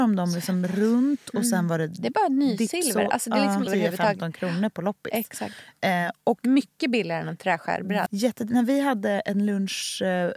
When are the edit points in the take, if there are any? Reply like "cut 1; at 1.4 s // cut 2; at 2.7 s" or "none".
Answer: cut 1; at 3.7 s // cut 2; at 8.1 s